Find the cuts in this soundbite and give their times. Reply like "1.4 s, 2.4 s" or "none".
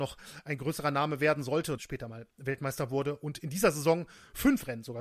1.8 s